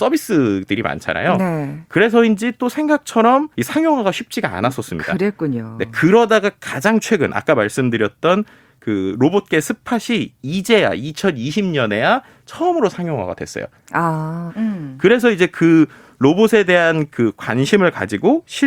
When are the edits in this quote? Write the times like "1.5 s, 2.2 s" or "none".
3.5 s, 14.5 s